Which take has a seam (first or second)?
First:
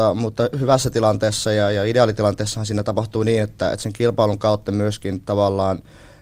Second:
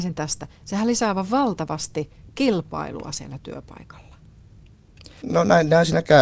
second